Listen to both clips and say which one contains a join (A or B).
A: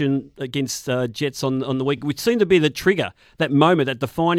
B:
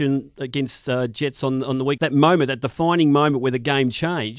B